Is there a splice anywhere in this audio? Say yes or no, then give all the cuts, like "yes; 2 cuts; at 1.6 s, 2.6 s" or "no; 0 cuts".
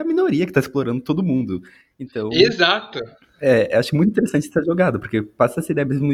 no; 0 cuts